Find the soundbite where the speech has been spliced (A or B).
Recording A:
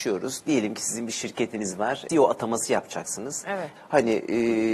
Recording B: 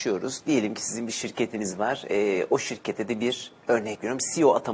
A